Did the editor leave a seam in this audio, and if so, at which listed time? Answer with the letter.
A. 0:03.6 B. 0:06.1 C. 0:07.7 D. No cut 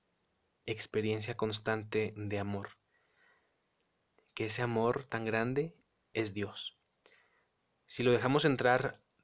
D